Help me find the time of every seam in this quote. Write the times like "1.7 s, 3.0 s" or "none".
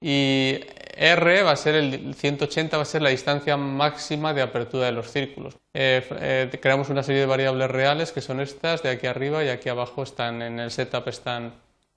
5.6 s